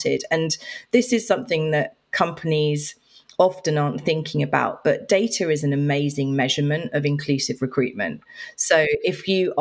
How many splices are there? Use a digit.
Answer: 0